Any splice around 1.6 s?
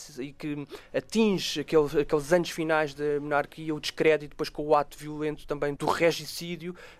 no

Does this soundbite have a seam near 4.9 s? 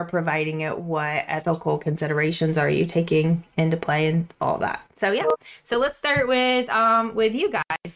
no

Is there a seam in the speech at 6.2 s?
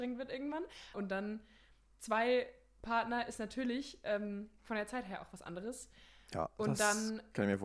no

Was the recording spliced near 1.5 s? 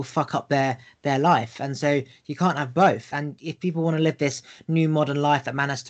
no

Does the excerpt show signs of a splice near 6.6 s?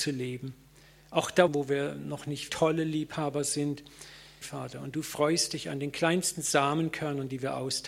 no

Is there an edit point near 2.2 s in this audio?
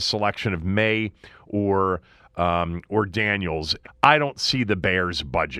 no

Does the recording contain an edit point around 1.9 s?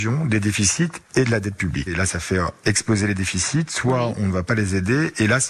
yes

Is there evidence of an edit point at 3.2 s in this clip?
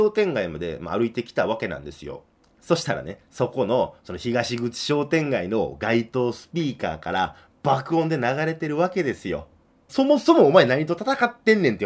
no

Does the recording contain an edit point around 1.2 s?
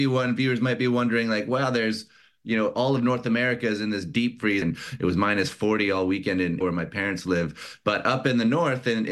no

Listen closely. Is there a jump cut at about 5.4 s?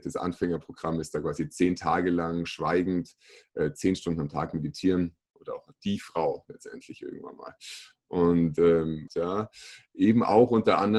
yes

